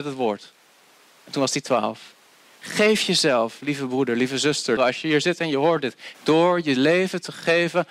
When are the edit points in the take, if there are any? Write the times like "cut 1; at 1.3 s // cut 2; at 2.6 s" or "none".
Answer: cut 1; at 4.8 s // cut 2; at 6.1 s